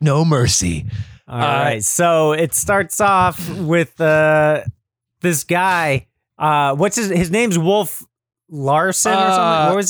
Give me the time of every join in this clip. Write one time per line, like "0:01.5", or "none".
none

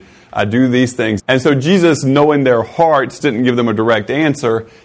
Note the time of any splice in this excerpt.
0:01.2
0:03.2

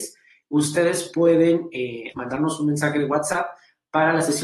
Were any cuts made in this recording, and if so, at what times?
0:02.1

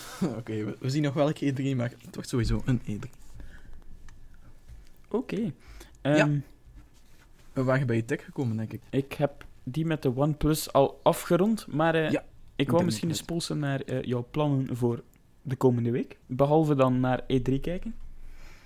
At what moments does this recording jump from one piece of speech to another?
0:08.8
0:16.2

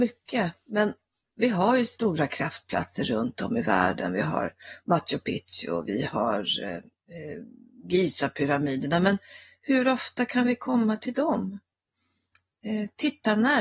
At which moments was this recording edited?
none

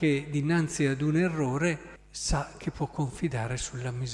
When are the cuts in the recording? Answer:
0:02.0

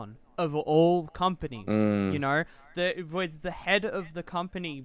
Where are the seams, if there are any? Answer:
none

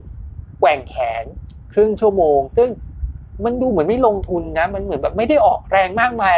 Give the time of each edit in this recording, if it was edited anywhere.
none

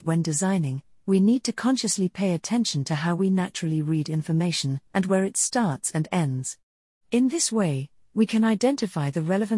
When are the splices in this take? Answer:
0:04.9

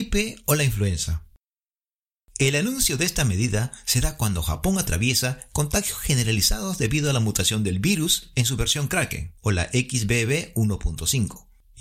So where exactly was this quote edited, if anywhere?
none

